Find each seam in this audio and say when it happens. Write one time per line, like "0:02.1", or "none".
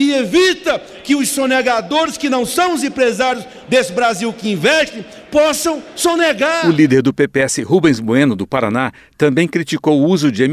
none